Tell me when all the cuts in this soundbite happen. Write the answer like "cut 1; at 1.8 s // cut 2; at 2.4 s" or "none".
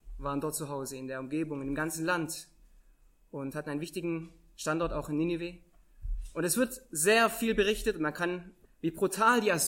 cut 1; at 8.6 s

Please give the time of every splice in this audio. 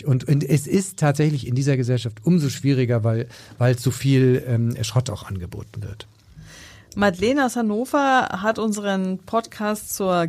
none

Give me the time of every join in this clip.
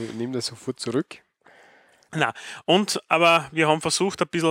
none

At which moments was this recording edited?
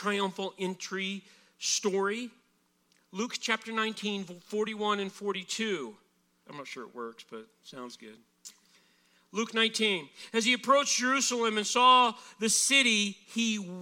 cut 1; at 6.4 s

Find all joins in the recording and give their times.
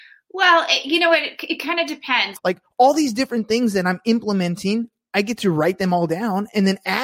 cut 1; at 2.4 s

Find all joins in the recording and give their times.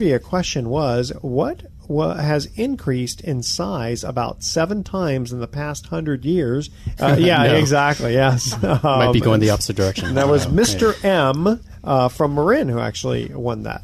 cut 1; at 7.0 s

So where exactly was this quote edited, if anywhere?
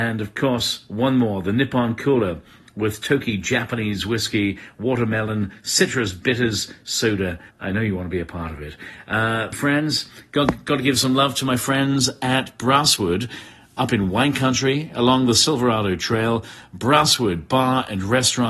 cut 1; at 7.5 s // cut 2; at 9.5 s

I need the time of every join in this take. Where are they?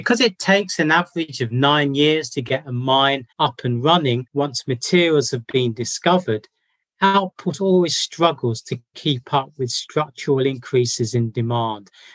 cut 1; at 3.3 s

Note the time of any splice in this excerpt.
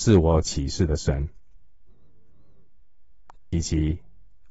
cut 1; at 3.3 s

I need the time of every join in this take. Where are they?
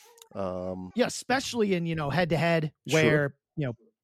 cut 1; at 0.9 s

